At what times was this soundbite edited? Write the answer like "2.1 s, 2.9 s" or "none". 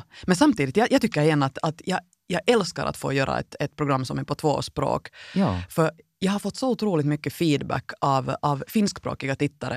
none